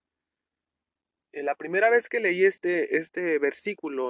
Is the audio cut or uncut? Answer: cut